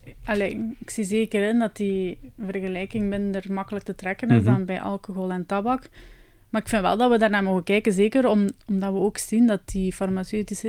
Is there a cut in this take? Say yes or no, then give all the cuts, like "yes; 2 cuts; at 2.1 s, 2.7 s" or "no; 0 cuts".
no; 0 cuts